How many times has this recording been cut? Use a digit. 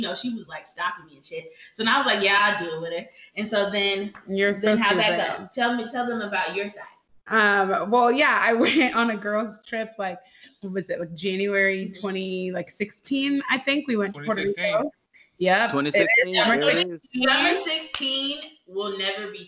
0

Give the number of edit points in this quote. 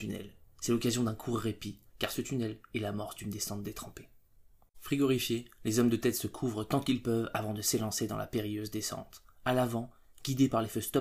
1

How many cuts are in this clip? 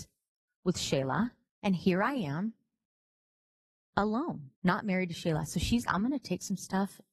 3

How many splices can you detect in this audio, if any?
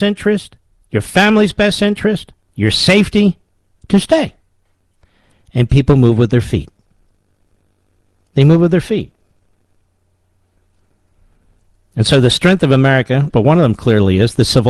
1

